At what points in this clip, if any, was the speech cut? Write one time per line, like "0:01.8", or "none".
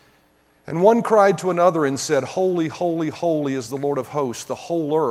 none